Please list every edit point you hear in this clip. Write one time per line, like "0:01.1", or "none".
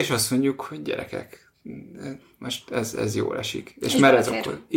none